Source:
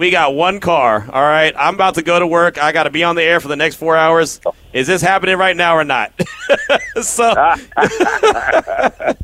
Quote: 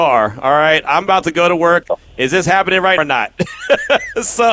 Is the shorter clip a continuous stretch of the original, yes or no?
no